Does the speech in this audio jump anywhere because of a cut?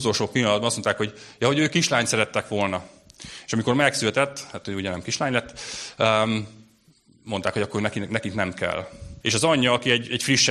yes; 1 cut; at 9.2 s

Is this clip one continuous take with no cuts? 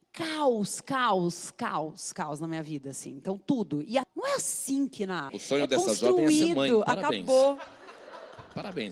no; 2 cuts; at 4.0 s, 5.3 s

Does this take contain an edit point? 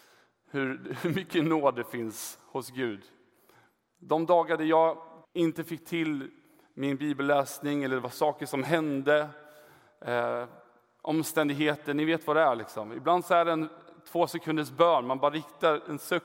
yes; 1 cut; at 5.2 s

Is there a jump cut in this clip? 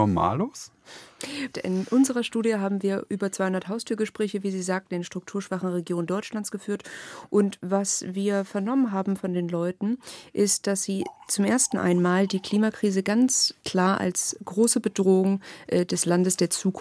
yes; 1 cut; at 1.5 s

